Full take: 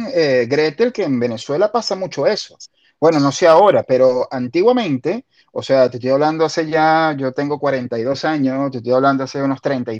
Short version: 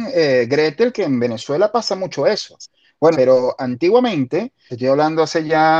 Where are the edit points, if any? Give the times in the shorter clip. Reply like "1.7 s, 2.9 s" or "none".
3.1 s, 4.7 s